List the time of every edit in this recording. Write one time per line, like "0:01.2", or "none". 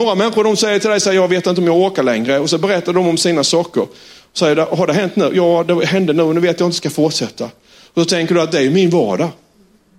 none